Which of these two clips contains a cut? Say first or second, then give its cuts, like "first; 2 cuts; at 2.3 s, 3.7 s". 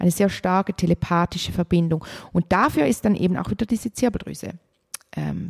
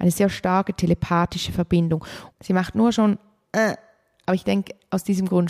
second; 1 cut; at 2.3 s